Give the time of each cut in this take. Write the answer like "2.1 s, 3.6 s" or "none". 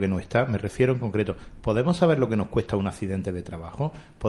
none